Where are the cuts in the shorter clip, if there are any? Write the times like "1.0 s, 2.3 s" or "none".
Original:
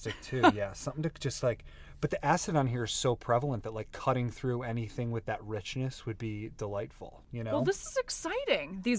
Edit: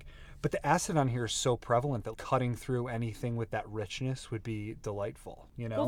2.1 s